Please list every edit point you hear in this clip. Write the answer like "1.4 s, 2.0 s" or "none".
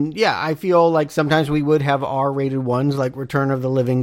none